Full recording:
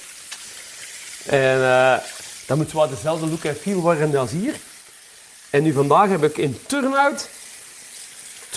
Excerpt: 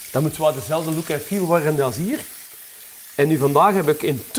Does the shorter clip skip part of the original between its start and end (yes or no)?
no